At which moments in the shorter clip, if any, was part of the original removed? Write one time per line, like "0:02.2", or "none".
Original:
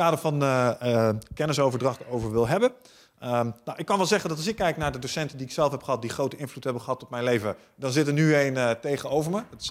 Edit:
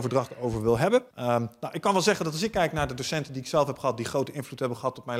0:01.1